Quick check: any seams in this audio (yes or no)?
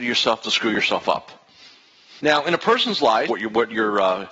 yes